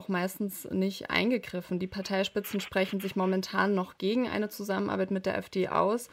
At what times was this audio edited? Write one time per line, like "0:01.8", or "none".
none